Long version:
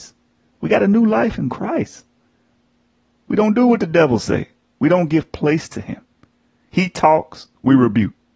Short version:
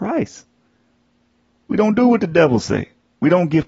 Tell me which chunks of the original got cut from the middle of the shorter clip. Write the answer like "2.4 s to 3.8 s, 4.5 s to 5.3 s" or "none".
none